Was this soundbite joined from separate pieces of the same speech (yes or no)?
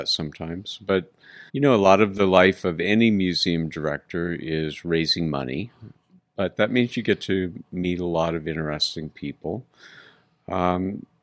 yes